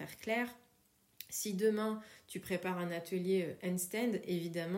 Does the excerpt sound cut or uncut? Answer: uncut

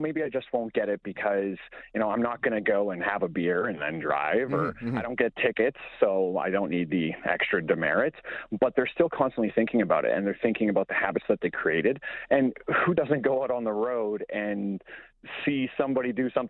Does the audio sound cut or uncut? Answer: uncut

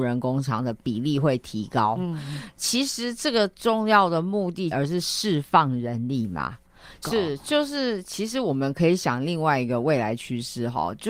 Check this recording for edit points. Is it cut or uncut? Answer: cut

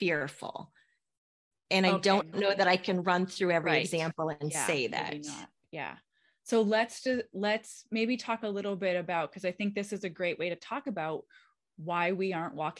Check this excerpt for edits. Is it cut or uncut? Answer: uncut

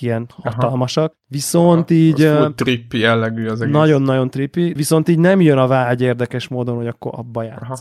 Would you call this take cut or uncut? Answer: cut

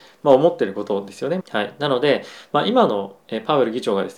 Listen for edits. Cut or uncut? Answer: cut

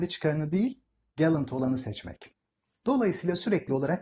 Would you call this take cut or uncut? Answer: cut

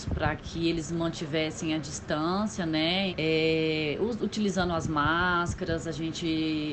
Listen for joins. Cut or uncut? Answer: cut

